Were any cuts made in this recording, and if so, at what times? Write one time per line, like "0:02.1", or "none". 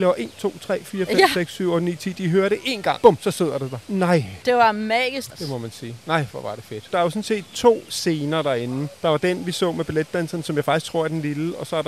0:05.3